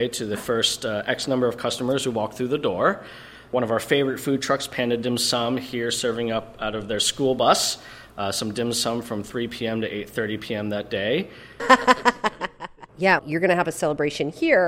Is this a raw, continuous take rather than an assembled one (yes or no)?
no